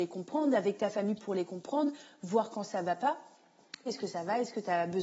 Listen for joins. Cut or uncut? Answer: cut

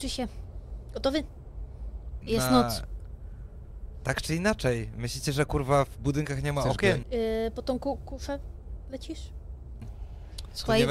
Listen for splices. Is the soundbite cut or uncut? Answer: cut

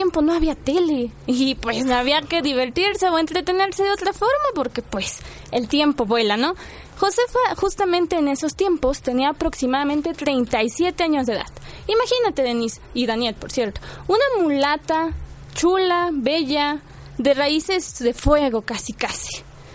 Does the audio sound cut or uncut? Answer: uncut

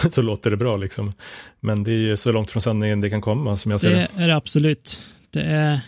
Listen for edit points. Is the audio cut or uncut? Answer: cut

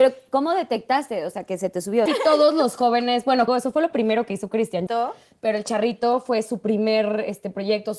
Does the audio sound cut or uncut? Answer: cut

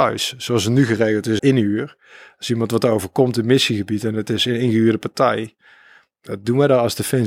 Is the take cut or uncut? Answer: cut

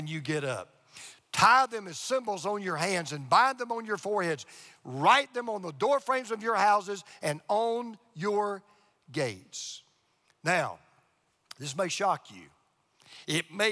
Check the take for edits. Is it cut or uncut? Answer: uncut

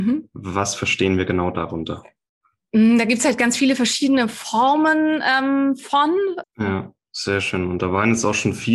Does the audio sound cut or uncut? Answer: cut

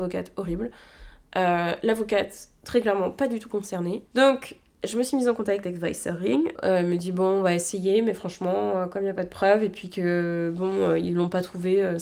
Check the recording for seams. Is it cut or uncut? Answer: cut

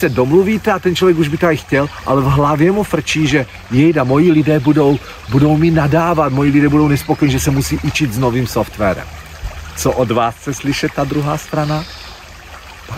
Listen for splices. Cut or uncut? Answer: uncut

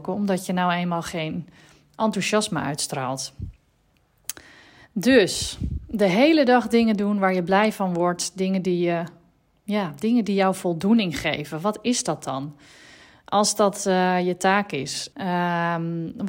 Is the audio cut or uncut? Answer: cut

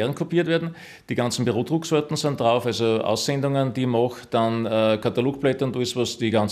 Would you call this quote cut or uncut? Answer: uncut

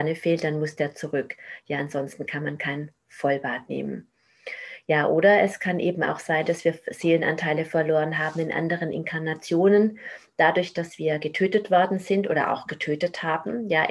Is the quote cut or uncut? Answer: uncut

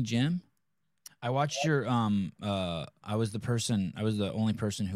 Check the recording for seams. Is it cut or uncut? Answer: cut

